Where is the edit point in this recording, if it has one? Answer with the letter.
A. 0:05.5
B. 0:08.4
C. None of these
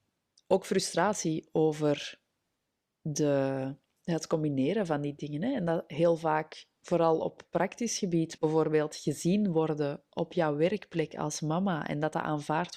B